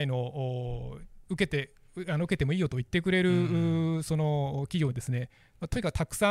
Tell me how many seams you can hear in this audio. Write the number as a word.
one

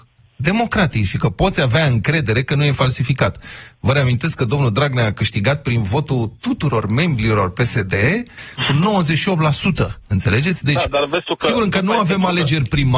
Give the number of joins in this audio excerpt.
one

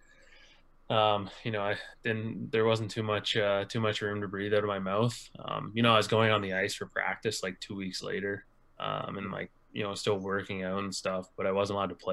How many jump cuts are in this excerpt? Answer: zero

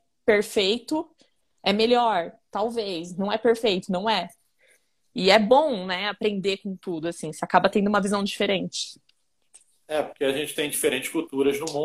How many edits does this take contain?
zero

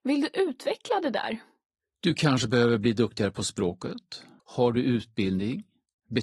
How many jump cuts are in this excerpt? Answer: one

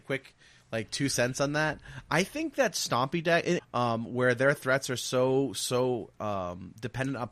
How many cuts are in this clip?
one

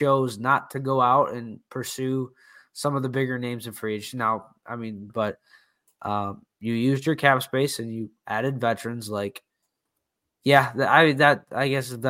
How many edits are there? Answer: one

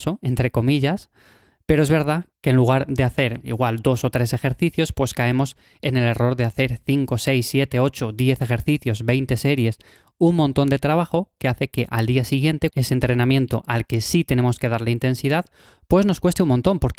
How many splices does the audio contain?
one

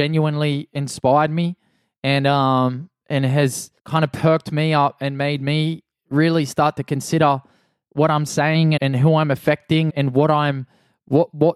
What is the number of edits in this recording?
three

